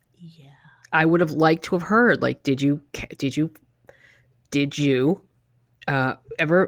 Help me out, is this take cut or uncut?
uncut